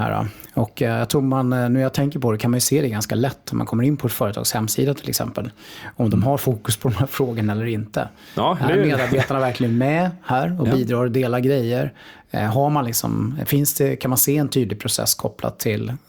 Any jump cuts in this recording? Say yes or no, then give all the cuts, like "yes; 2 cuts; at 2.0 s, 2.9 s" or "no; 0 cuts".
no; 0 cuts